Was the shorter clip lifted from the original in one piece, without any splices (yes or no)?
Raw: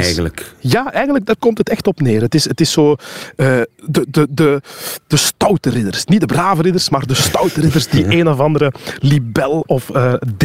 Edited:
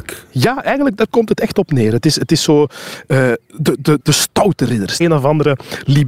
no